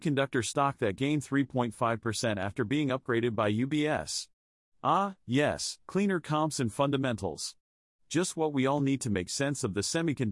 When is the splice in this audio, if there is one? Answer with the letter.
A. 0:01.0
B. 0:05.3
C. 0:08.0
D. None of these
D